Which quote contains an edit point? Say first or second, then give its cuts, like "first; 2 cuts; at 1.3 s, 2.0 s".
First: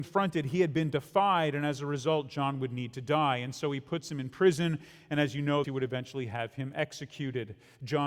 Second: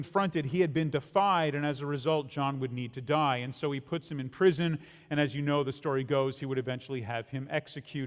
first; 1 cut; at 5.6 s